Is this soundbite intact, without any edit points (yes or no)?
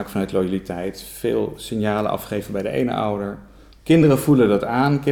no